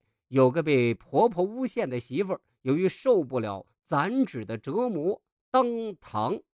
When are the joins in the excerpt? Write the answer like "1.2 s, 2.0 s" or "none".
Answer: none